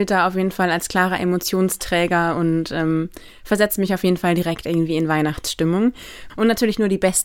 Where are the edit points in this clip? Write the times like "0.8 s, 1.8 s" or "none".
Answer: 6.3 s